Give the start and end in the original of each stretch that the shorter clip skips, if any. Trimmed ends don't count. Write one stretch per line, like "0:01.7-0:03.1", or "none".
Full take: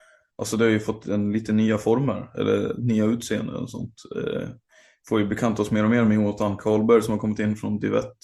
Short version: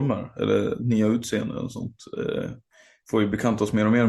none